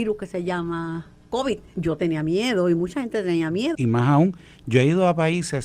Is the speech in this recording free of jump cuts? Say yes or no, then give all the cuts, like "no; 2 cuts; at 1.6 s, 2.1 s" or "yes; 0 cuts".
no; 2 cuts; at 1.7 s, 3.7 s